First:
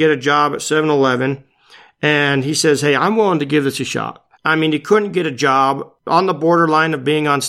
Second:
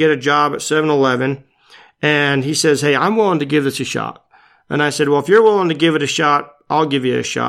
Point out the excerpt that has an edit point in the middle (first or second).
first